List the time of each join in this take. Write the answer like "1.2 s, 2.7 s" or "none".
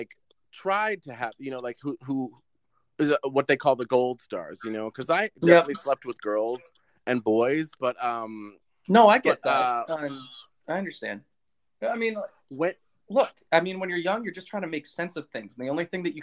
7.8 s